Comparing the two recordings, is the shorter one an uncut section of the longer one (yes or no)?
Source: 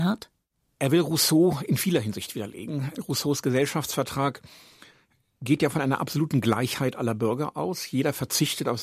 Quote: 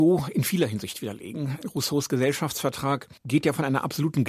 no